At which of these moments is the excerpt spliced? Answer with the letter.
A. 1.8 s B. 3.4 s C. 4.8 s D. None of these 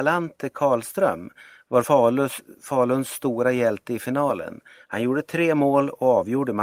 D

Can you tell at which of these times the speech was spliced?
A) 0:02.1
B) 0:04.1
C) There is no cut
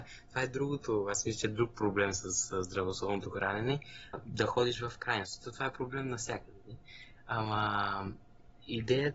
B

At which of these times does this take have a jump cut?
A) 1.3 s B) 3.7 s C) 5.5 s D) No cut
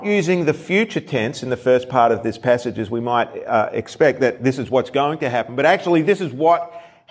D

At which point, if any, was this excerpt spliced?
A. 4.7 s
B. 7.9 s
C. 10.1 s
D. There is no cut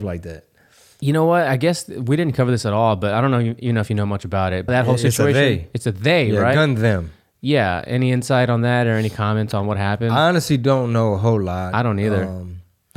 A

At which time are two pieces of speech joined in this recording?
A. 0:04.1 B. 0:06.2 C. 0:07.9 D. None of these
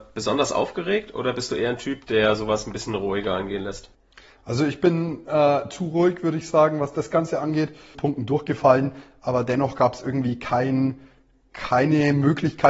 C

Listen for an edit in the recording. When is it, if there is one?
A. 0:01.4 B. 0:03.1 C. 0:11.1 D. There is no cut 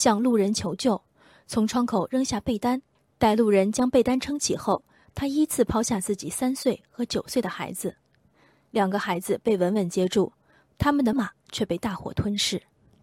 C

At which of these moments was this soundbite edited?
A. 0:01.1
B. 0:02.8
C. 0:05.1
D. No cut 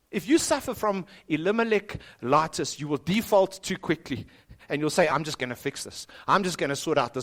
C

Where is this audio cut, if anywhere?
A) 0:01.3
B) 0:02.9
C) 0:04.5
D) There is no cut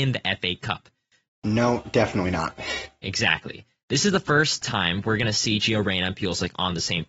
A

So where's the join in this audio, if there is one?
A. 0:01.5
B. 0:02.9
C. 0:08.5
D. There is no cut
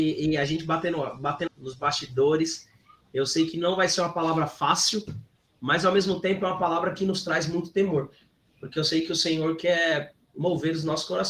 A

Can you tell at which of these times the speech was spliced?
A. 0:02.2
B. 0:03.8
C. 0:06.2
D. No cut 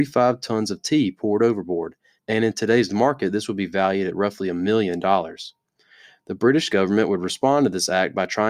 A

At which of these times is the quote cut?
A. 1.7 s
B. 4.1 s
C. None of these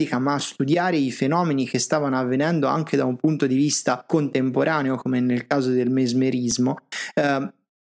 B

